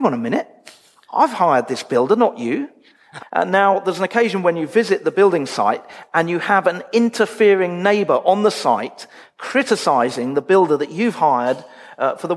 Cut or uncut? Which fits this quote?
cut